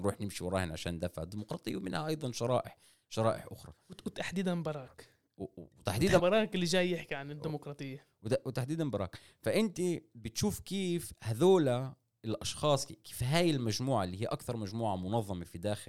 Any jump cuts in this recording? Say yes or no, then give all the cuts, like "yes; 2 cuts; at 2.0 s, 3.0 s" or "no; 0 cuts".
yes; 1 cut; at 6.2 s